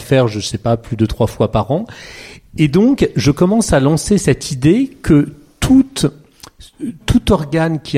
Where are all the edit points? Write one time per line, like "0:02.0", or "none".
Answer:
0:07.0